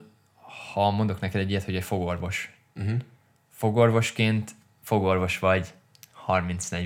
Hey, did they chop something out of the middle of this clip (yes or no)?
no